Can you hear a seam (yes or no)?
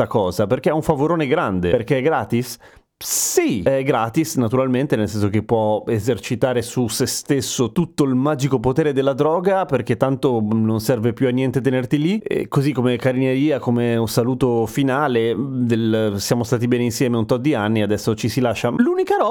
no